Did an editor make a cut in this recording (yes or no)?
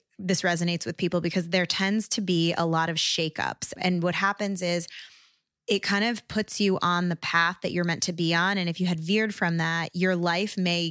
no